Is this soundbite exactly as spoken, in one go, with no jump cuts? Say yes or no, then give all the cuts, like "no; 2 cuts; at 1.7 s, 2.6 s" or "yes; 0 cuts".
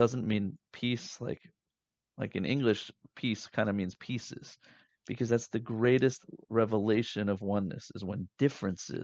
no; 1 cut; at 4.9 s